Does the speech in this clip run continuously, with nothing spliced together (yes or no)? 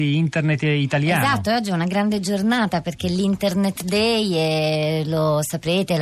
yes